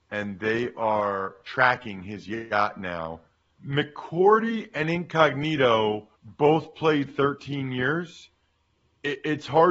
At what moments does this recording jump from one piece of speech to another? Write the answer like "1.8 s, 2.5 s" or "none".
3.6 s, 6.2 s